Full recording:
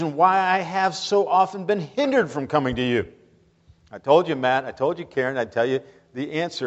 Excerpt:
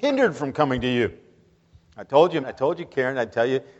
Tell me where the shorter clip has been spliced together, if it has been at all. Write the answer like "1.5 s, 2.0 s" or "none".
2.4 s